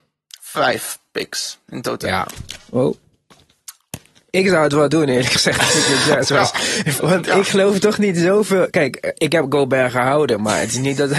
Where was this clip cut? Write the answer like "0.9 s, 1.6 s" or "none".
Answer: 7.0 s